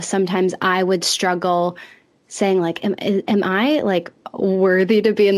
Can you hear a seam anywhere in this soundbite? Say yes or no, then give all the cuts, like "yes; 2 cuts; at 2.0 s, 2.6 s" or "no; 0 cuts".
no; 0 cuts